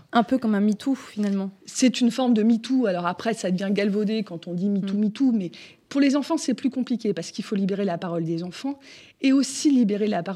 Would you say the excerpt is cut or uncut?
uncut